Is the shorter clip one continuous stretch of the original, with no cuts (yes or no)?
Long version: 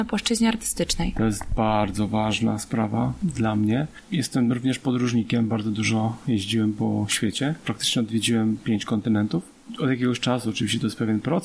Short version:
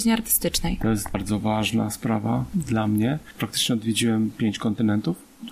no